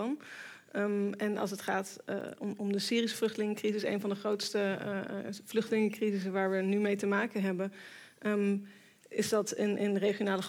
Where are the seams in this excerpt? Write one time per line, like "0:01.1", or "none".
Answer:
none